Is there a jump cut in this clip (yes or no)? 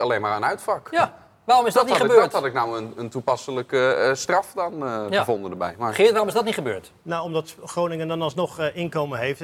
no